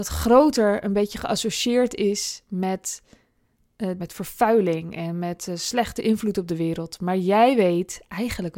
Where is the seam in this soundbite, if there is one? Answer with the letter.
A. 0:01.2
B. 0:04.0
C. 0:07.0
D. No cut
B